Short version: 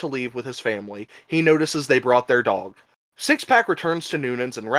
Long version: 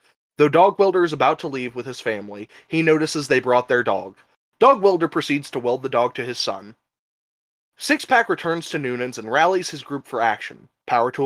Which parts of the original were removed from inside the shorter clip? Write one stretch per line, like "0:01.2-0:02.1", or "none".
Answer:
0:04.4-0:07.7